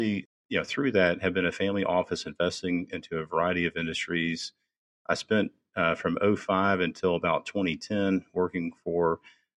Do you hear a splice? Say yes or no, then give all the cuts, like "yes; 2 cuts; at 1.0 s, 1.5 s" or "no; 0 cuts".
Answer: no; 0 cuts